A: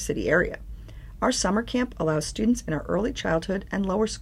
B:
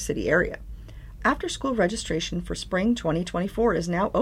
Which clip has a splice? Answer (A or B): B